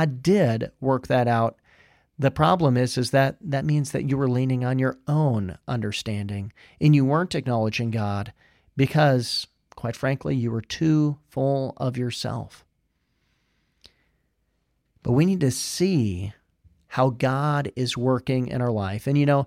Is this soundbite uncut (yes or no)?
yes